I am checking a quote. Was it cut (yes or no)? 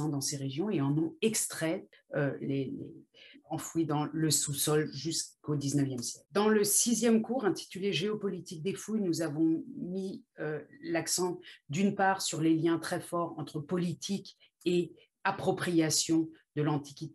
yes